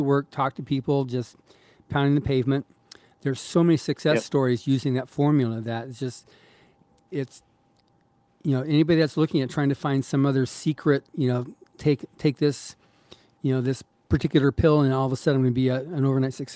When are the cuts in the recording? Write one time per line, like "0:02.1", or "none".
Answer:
none